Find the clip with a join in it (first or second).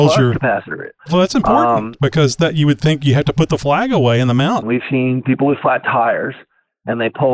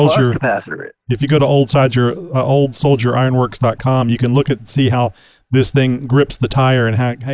first